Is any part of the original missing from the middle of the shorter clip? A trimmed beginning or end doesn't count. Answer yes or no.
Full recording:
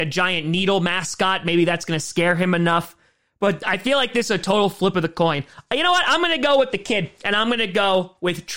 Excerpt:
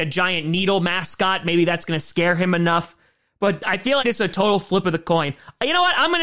yes